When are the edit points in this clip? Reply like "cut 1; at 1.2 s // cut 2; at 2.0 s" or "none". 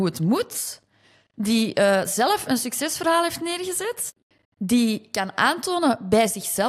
none